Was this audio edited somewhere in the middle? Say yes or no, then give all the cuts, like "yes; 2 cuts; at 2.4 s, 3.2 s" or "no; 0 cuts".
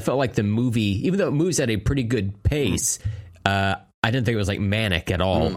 no; 0 cuts